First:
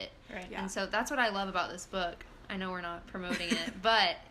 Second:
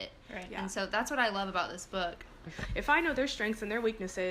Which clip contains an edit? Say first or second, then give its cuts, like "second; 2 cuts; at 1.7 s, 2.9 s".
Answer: second; 1 cut; at 2.5 s